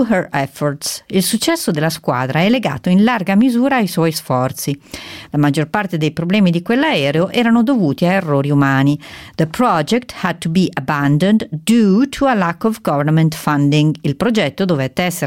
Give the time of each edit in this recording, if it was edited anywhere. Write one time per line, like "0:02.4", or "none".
0:05.3